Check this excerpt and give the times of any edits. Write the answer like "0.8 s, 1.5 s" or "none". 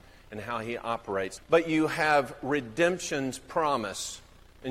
1.4 s